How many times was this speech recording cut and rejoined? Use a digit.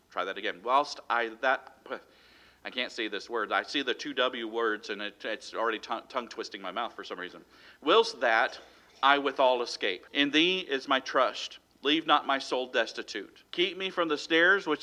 2